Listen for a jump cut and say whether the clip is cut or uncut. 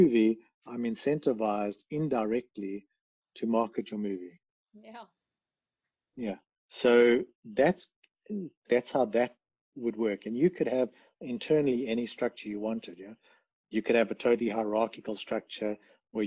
uncut